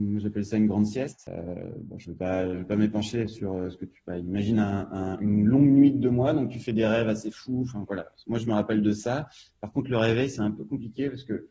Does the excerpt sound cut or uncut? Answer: uncut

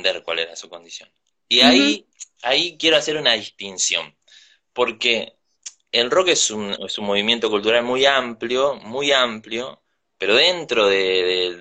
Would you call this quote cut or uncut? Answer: uncut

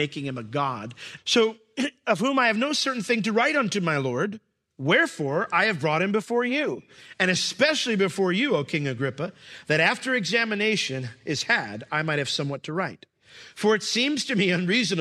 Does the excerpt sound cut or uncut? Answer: cut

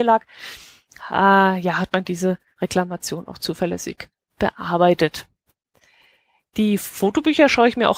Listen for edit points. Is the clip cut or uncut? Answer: uncut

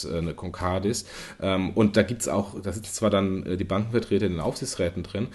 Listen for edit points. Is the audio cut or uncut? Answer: uncut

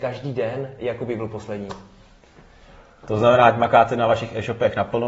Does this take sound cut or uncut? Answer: uncut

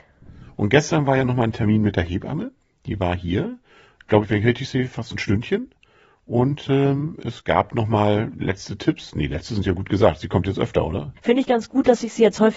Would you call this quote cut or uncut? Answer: uncut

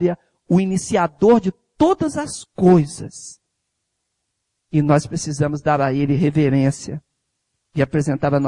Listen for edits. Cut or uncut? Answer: uncut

